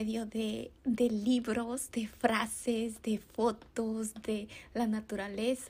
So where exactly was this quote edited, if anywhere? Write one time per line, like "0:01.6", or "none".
none